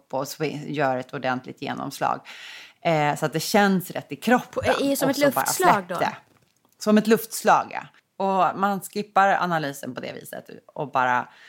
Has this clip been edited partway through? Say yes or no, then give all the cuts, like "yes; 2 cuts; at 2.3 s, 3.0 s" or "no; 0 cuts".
no; 0 cuts